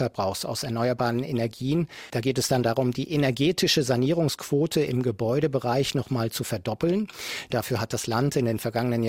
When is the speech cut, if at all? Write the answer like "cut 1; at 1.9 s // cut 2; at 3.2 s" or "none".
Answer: cut 1; at 2.1 s // cut 2; at 7.5 s